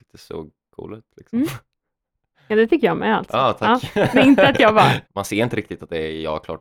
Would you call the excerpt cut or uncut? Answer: cut